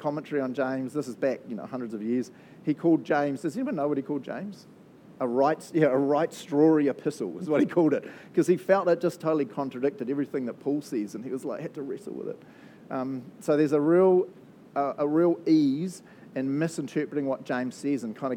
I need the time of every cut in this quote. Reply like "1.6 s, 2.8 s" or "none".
5.2 s